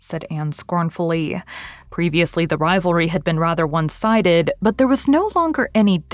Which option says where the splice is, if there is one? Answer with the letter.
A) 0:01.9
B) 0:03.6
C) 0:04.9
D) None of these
A